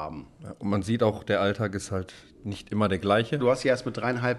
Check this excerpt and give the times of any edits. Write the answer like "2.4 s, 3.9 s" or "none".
3.4 s